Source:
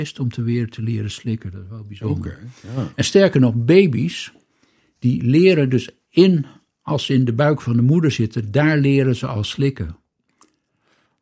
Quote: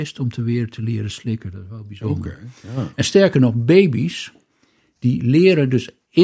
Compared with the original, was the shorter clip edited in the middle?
no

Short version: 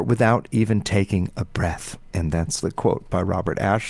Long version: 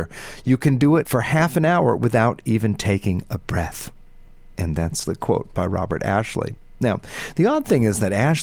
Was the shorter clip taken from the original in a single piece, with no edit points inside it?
no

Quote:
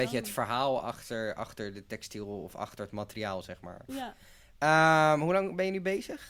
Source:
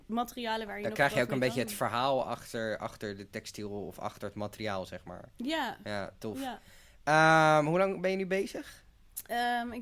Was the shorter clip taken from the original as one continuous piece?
no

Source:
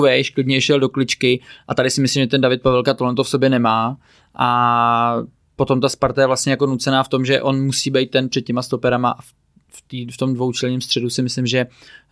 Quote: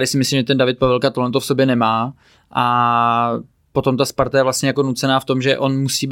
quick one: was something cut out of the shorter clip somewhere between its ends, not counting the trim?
no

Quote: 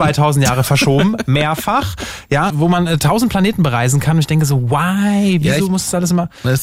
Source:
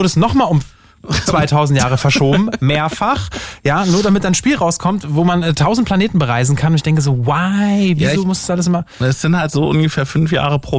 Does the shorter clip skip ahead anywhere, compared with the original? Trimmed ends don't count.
yes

